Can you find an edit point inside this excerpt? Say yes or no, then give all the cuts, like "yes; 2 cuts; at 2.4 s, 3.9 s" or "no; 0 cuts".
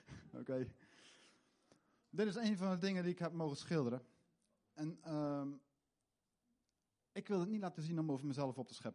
no; 0 cuts